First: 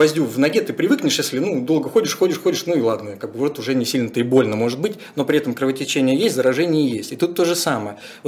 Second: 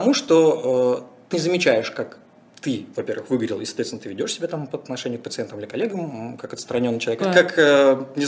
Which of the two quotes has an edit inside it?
second; 2 cuts; at 1.3 s, 7.2 s

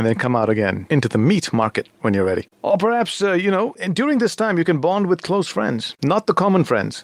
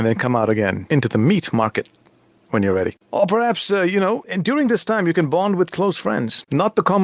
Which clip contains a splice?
first; 1 cut; at 1.9 s

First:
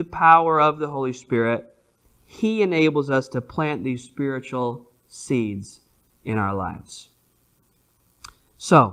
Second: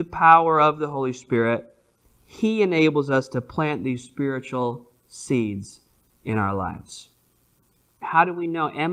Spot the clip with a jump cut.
second; 1 cut; at 8.0 s

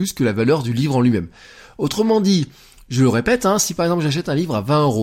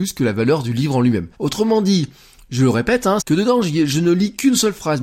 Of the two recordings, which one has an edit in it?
second; 2 cuts; at 1.3 s, 3.2 s

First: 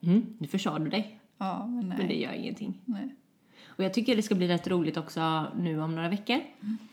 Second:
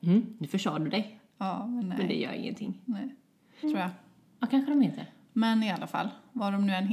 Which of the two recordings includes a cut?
second; 1 cut; at 3.6 s

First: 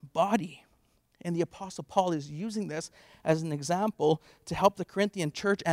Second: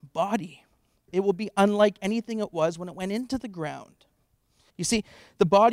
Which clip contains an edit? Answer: second; 2 cuts; at 1.1 s, 4.7 s

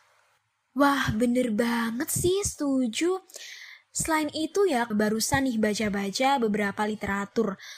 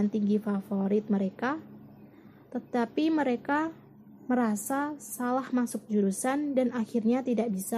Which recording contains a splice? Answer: first; 1 cut; at 4.9 s

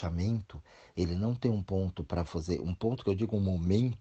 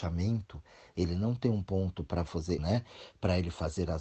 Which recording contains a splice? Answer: second; 1 cut; at 2.6 s

